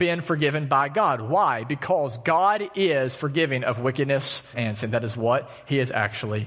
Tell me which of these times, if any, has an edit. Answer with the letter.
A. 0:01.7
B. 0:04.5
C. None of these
B